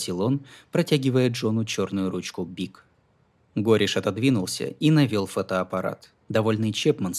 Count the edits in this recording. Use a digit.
1